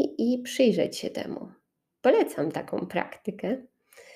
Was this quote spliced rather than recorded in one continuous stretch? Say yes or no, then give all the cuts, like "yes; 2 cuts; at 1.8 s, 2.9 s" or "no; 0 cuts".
no; 0 cuts